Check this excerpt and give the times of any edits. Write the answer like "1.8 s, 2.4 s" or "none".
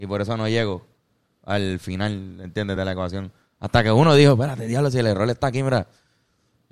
none